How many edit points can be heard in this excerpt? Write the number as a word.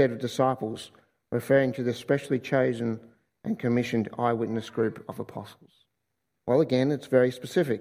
one